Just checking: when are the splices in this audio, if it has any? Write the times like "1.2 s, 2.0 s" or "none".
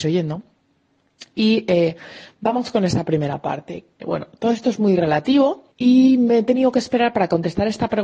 4.0 s, 5.7 s